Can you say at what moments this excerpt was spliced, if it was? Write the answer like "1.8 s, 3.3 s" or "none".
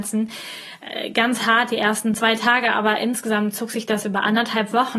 none